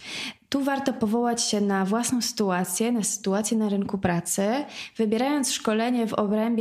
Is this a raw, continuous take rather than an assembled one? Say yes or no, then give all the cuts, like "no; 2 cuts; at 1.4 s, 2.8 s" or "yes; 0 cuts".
yes; 0 cuts